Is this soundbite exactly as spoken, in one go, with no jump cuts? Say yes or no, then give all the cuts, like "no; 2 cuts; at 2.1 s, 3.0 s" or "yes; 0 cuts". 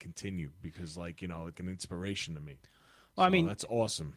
no; 1 cut; at 1.5 s